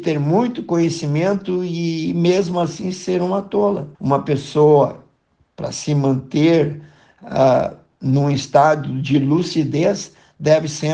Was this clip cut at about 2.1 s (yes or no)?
no